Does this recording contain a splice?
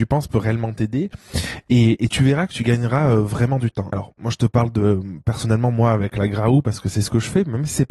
yes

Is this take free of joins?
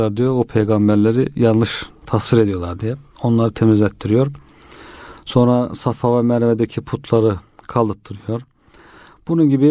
yes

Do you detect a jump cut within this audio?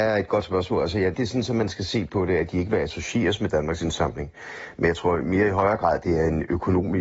yes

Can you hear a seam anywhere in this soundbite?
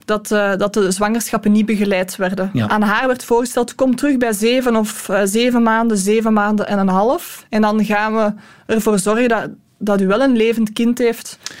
no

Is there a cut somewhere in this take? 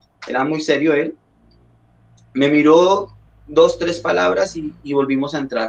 no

